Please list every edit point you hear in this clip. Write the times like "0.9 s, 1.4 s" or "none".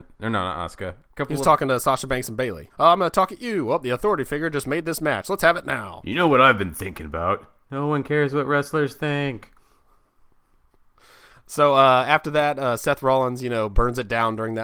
1.1 s, 2.7 s